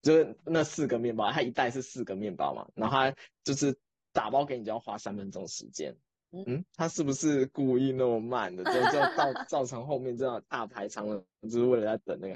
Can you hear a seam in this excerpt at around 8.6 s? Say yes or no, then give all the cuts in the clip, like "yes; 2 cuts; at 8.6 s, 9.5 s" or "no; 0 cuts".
no; 2 cuts; at 3.3 s, 6.4 s